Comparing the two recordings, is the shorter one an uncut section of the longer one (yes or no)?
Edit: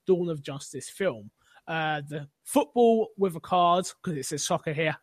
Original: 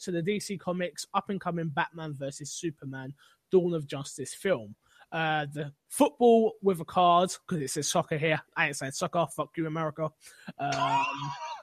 yes